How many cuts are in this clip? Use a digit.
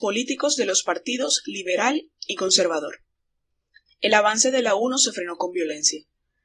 1